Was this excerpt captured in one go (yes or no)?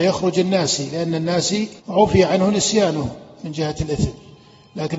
no